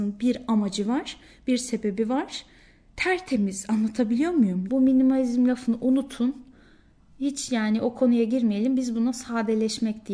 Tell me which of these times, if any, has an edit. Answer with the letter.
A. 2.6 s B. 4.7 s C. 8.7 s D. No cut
B